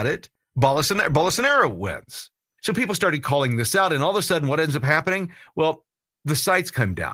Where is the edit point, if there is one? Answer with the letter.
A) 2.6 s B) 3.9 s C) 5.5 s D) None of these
A